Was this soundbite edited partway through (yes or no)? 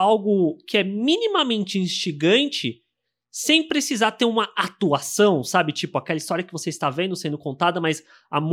no